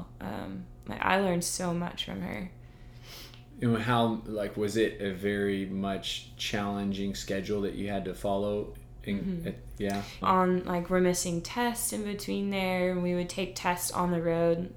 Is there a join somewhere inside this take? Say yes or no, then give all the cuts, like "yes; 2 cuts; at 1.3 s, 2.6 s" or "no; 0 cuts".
yes; 1 cut; at 10.2 s